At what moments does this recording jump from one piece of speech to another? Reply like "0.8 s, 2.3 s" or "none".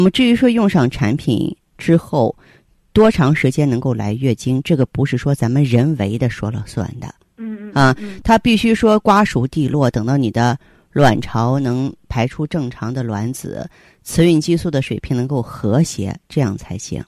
none